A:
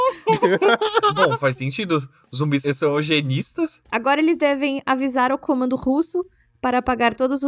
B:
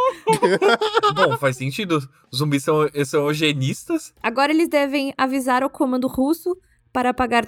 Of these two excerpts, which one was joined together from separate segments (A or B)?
A